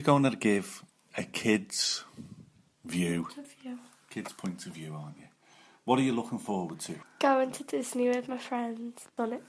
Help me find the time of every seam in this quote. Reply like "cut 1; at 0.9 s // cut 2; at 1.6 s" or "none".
none

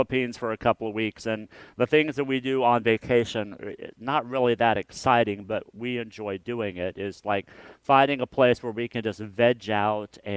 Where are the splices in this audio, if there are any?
none

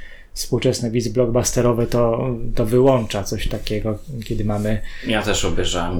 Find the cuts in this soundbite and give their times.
none

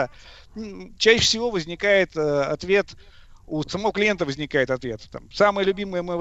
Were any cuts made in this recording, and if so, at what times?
cut 1; at 1.0 s // cut 2; at 3.6 s

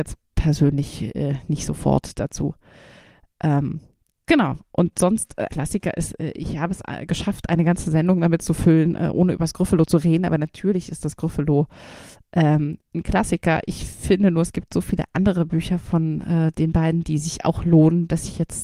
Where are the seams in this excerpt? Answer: cut 1; at 5.5 s

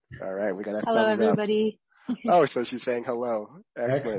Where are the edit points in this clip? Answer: cut 1; at 2.5 s

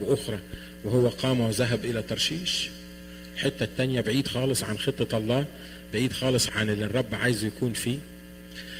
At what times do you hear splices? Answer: cut 1; at 6.5 s

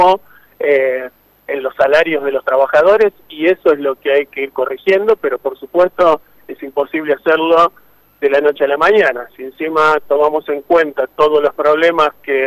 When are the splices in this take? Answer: none

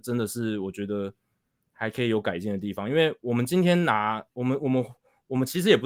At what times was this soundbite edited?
none

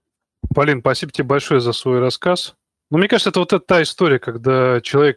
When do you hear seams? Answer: cut 1; at 2.9 s

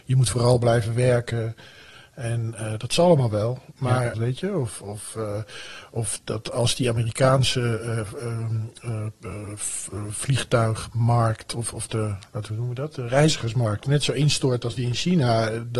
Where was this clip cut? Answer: cut 1; at 4.1 s

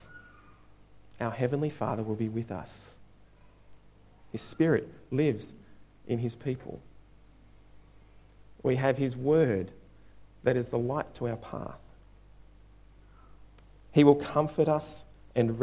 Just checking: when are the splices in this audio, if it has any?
none

